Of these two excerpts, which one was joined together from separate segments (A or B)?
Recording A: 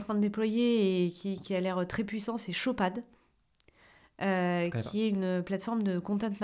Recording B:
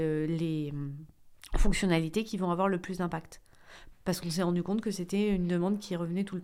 B